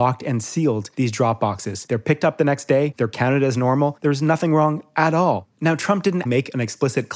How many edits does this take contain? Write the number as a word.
one